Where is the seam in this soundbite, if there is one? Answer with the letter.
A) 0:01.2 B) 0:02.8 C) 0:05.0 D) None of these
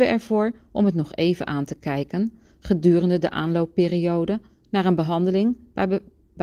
D